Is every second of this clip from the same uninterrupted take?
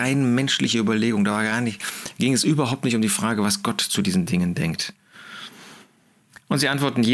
yes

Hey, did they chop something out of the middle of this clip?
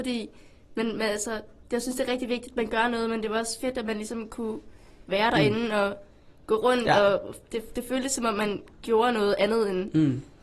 no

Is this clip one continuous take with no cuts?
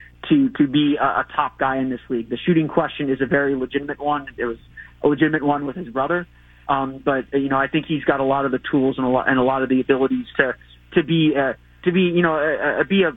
yes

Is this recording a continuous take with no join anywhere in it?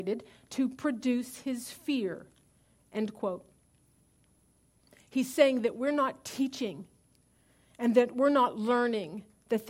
yes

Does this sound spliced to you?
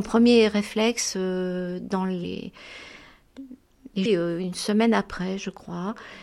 yes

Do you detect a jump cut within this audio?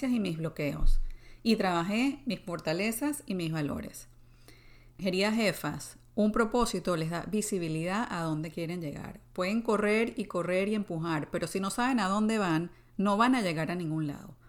yes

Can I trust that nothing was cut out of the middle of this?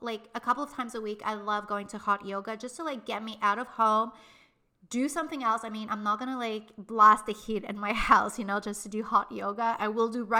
yes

